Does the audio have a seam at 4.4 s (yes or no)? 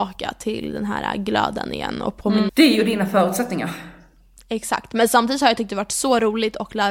no